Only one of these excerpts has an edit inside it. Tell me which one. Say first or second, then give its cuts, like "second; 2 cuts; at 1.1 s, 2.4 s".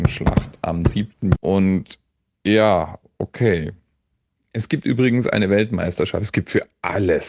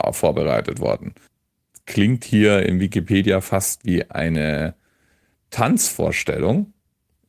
first; 1 cut; at 1.4 s